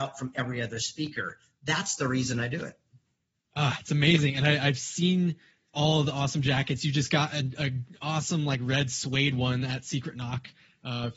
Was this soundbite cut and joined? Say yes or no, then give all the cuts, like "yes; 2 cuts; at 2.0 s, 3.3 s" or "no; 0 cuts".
no; 0 cuts